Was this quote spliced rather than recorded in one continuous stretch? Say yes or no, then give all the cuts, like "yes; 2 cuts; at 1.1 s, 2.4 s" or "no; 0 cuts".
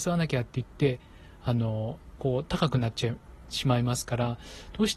no; 0 cuts